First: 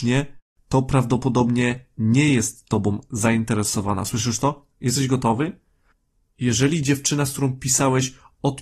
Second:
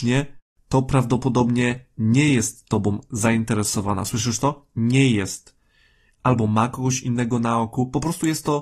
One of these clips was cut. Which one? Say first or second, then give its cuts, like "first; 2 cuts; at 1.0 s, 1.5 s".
first; 1 cut; at 4.7 s